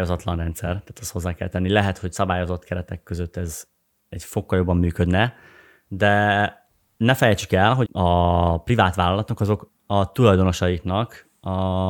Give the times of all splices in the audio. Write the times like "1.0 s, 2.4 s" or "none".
7.9 s, 9.7 s